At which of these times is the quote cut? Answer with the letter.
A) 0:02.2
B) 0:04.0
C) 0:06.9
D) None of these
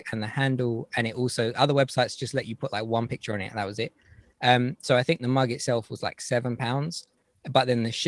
D